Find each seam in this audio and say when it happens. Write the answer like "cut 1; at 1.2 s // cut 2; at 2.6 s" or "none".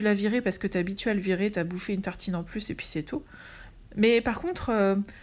none